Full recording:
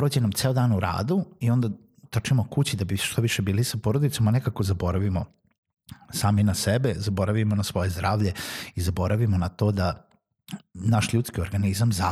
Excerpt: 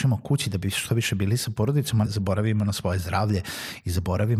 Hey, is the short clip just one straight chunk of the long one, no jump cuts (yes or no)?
no